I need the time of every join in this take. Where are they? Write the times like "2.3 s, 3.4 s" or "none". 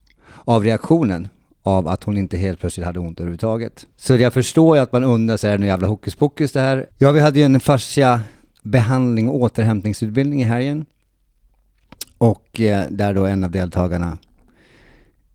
3.9 s, 6.9 s